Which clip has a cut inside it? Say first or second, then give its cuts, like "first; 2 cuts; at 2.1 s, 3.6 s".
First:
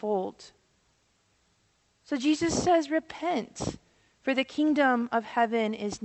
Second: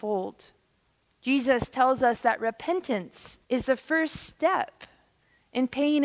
second; 2 cuts; at 1.1 s, 3.4 s